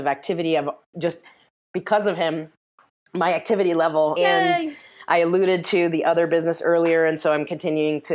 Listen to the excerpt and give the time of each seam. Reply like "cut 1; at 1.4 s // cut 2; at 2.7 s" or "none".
cut 1; at 4.2 s